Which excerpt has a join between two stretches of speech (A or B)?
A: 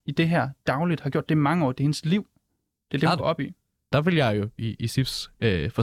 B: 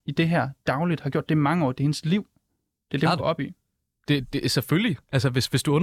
A